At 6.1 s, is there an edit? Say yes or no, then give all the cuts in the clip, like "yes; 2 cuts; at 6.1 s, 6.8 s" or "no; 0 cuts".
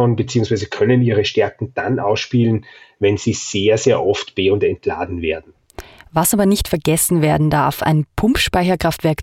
no; 0 cuts